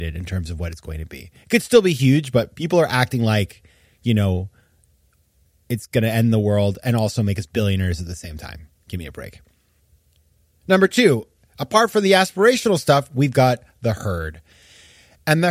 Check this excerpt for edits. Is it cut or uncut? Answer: uncut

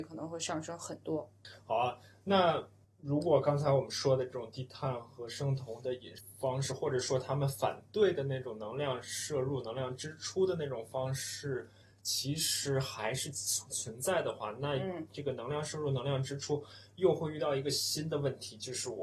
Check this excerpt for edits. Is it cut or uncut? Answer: uncut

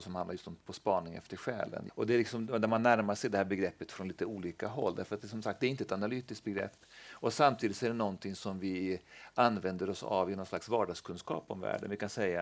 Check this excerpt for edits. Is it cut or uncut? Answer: cut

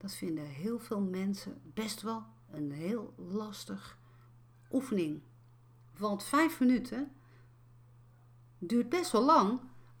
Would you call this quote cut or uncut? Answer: uncut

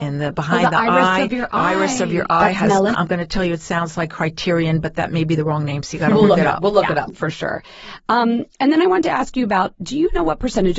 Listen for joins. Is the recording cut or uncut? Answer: cut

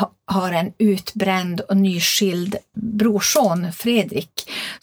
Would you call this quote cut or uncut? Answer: cut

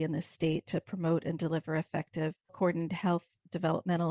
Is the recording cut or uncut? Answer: cut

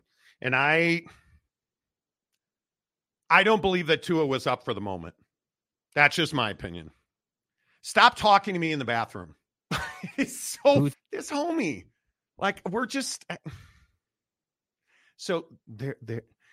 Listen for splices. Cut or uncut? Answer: cut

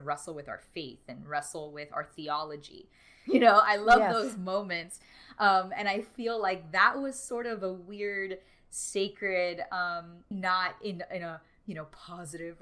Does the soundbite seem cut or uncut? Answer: cut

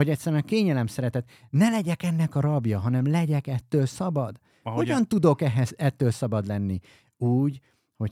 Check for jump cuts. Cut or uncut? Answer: uncut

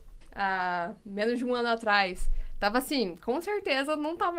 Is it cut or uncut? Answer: uncut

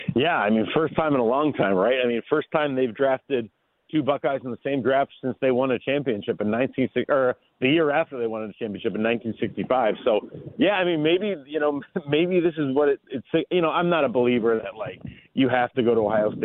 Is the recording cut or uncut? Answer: uncut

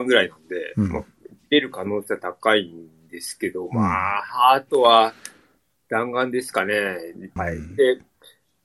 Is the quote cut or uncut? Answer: cut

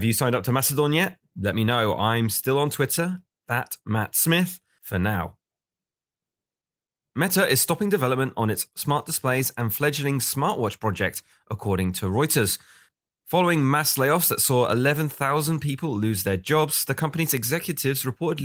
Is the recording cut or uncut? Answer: uncut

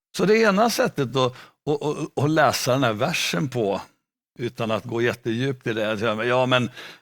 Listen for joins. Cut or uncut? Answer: uncut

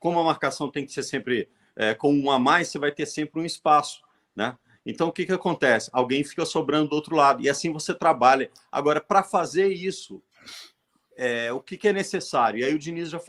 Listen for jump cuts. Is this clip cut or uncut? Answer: uncut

